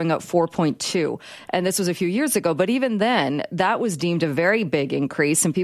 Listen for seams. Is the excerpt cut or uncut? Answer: uncut